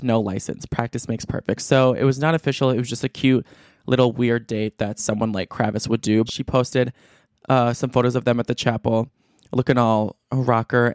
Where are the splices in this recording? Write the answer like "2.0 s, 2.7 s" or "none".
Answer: 6.3 s